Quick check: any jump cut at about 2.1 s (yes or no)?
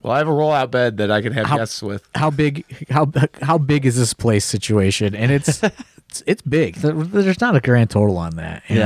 no